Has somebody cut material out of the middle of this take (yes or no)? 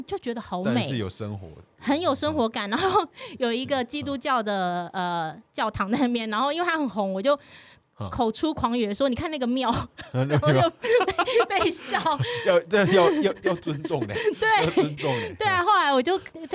no